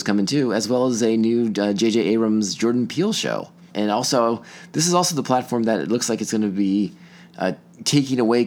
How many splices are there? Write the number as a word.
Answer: one